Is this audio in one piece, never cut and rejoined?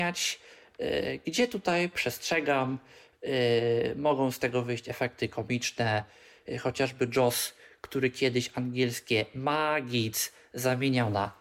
yes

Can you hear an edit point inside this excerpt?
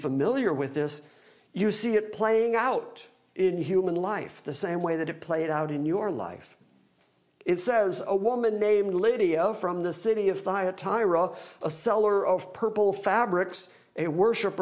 no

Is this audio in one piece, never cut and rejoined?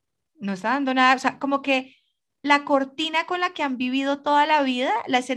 yes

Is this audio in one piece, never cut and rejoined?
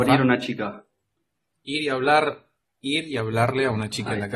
yes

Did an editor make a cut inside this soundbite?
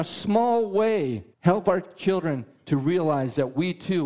yes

